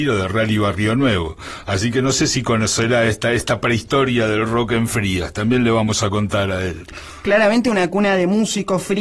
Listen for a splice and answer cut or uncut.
uncut